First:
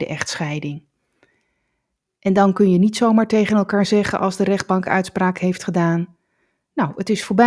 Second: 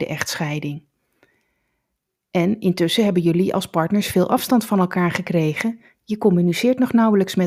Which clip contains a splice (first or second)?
first